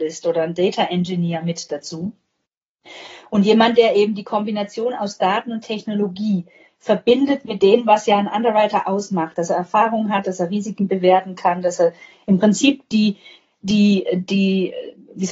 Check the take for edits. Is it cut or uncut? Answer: uncut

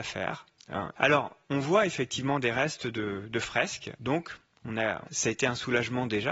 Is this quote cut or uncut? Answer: cut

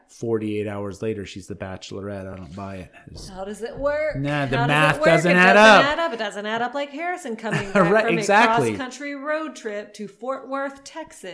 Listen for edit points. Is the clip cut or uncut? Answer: uncut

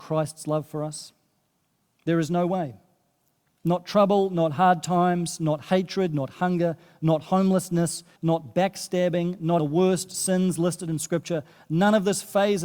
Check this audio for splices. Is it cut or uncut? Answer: cut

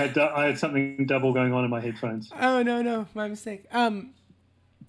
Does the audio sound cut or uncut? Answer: uncut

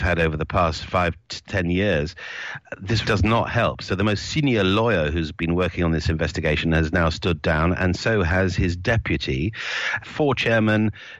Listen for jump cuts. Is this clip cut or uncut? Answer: cut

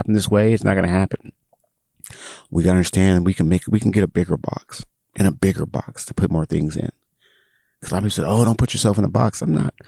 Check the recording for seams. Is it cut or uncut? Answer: uncut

